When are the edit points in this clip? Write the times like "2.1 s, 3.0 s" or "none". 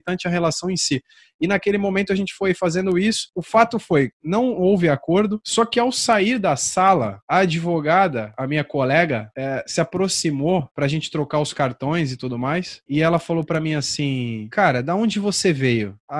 none

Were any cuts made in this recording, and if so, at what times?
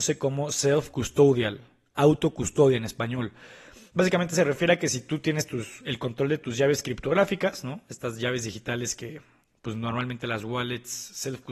none

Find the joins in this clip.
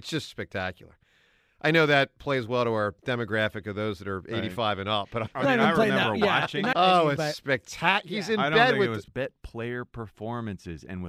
5.3 s, 6.7 s, 9.1 s

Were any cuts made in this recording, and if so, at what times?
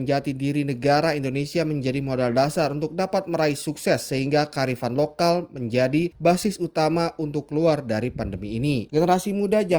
8.9 s

